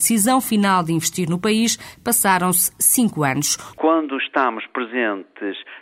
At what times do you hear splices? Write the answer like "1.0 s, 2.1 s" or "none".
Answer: 3.7 s